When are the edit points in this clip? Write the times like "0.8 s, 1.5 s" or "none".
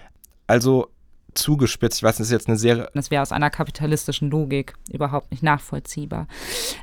3.0 s